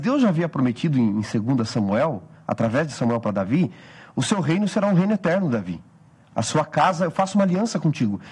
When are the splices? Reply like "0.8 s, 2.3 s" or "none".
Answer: none